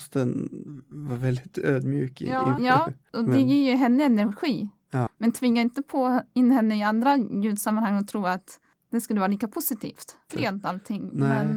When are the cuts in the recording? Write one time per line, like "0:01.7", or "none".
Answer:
0:02.6
0:05.1
0:10.3